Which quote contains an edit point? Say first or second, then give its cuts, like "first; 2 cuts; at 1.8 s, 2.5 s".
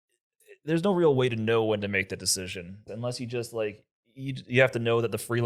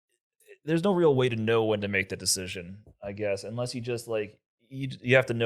first; 1 cut; at 2.9 s